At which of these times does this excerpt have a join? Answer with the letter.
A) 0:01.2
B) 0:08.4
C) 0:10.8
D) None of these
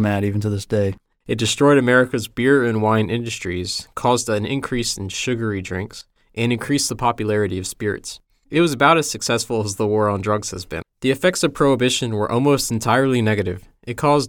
C